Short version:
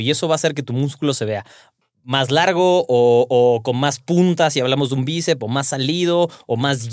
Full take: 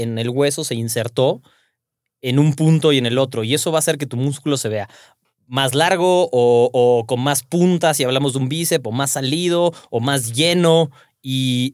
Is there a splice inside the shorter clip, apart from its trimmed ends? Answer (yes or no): no